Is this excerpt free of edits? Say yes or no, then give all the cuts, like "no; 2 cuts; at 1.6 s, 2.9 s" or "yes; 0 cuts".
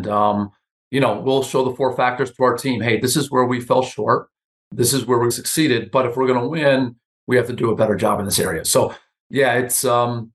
no; 2 cuts; at 5.3 s, 8.6 s